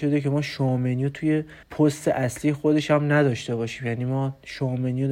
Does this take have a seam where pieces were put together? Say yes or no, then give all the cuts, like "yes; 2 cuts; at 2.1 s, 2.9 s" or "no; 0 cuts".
yes; 1 cut; at 1.6 s